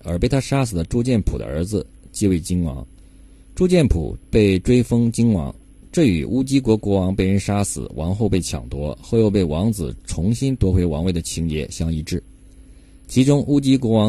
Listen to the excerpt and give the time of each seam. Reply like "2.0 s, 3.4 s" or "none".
none